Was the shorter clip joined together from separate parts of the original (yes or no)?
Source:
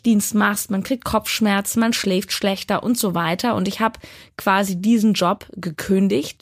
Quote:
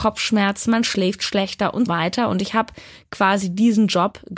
yes